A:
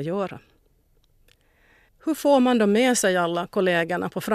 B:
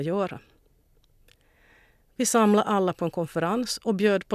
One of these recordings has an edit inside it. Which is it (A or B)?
A